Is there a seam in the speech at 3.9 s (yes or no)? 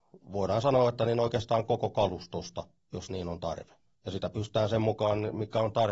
yes